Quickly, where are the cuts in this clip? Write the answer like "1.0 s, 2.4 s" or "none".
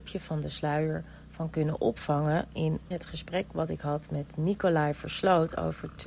2.9 s

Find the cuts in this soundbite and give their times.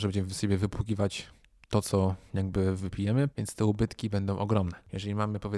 3.3 s

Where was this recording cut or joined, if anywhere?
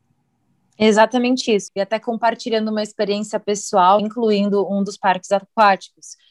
1.7 s, 4.0 s

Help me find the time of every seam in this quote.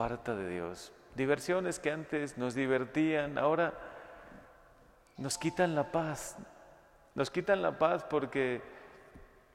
none

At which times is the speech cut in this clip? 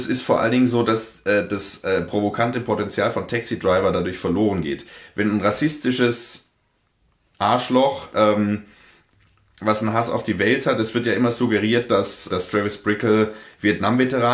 12.3 s

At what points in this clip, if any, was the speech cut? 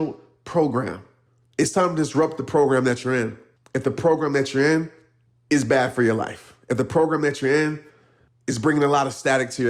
none

